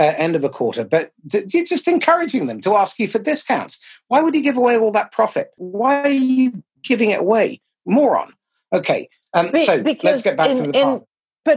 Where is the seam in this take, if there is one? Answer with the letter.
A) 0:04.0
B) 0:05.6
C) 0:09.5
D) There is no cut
B